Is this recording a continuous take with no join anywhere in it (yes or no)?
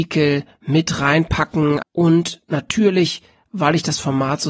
no